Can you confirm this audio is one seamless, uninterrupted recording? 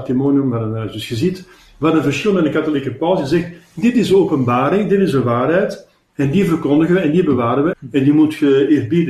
no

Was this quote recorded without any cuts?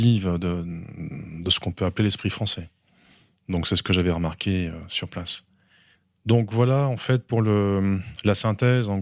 yes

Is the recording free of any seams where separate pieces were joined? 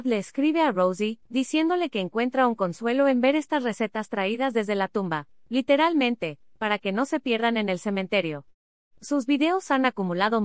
no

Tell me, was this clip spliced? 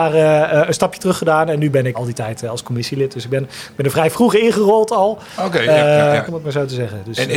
yes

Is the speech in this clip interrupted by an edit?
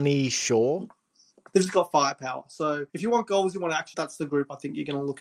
yes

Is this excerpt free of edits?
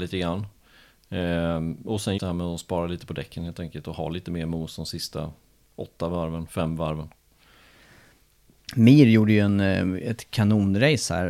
no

